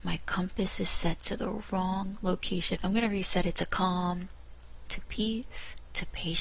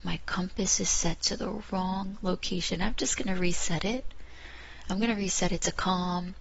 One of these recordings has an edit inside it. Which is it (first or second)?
first